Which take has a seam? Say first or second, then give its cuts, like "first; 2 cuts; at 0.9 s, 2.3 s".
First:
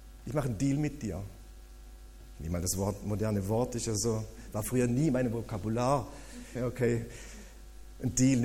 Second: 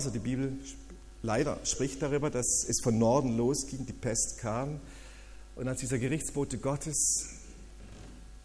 first; 1 cut; at 6.6 s